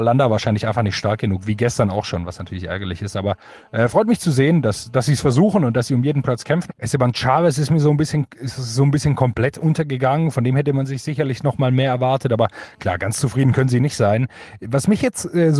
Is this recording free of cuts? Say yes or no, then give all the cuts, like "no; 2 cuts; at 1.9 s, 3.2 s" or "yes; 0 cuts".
no; 1 cut; at 6.7 s